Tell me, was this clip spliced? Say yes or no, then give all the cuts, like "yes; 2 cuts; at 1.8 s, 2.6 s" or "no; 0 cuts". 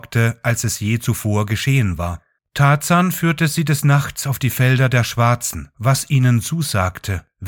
yes; 2 cuts; at 2.4 s, 5.7 s